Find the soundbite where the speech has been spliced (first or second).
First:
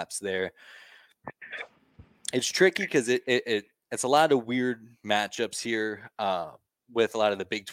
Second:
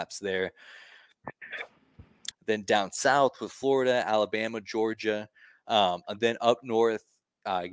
second